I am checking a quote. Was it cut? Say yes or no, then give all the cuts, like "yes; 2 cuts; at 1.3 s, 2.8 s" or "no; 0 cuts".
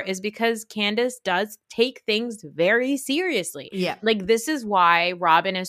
no; 0 cuts